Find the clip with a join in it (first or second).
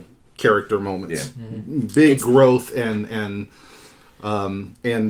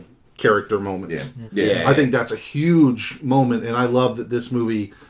second